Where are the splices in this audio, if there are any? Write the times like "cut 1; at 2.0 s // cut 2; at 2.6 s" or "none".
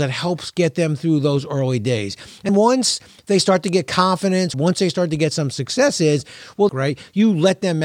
cut 1; at 2.5 s // cut 2; at 4.5 s // cut 3; at 6.7 s